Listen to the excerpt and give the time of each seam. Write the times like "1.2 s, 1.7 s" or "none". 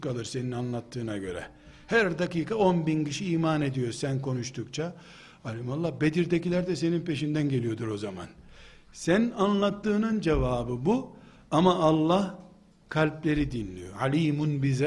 none